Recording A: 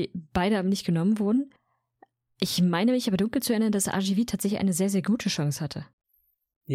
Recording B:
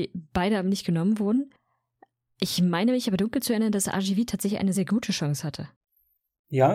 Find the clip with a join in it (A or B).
B